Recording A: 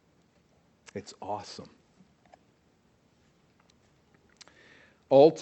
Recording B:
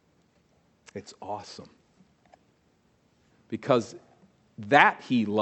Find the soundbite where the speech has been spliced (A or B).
B